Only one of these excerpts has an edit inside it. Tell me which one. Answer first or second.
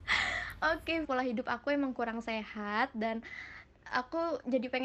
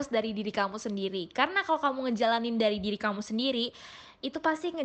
first